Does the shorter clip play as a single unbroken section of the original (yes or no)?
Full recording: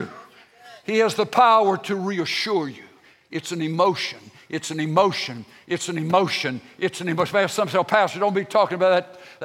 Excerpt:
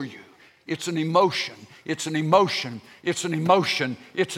yes